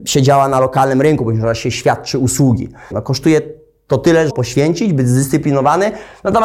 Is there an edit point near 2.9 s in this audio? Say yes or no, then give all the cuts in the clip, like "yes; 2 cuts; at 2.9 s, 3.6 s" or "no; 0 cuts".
yes; 2 cuts; at 2.9 s, 4.3 s